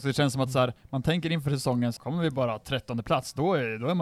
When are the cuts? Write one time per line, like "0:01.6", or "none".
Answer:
0:02.0